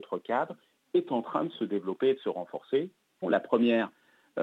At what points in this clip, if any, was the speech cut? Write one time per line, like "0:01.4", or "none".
0:03.2

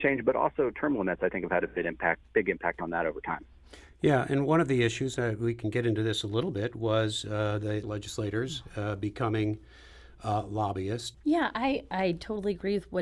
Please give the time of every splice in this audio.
0:07.8
0:11.1

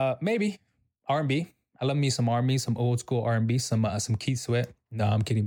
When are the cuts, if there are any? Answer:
none

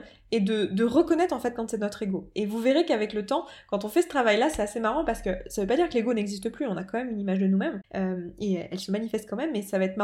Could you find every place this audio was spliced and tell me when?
none

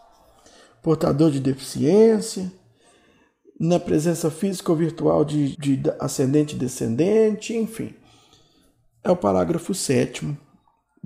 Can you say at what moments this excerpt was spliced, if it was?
0:05.5

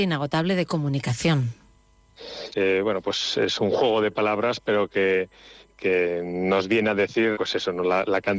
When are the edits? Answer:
0:02.5
0:07.3

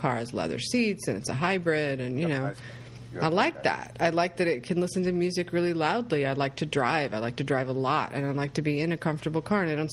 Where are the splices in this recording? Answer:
none

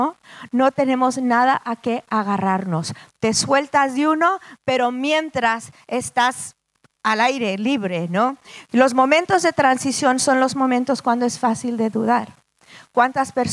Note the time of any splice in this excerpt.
0:04.6
0:08.7

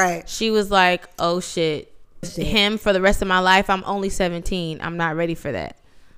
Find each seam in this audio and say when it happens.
0:02.2

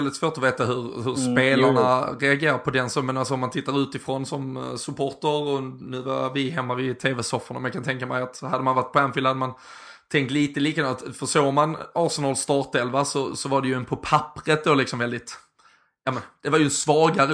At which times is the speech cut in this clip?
none

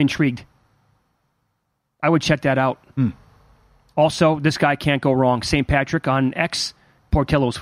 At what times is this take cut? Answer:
none

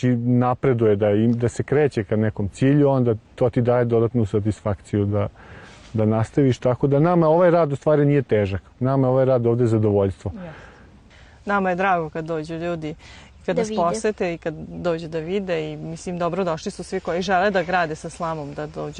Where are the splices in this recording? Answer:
none

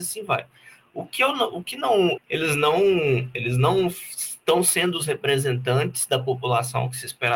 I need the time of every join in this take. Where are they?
0:02.2

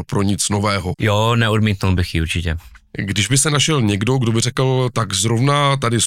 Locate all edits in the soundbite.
0:00.9

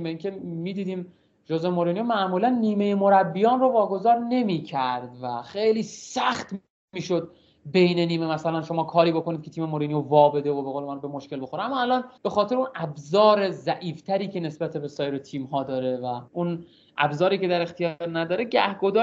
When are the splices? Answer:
0:12.2
0:16.3

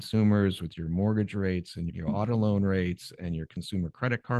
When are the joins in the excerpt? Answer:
0:01.9

